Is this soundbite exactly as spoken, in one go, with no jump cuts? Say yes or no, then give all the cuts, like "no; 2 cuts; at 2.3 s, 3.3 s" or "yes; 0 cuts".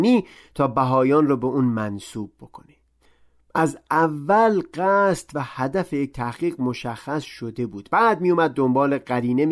yes; 0 cuts